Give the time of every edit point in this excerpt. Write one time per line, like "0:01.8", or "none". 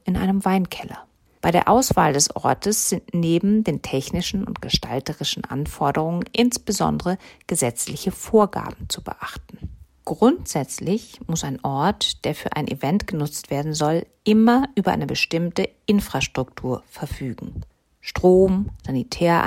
0:09.9